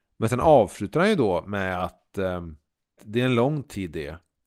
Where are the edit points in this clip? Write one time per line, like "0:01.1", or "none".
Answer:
0:03.0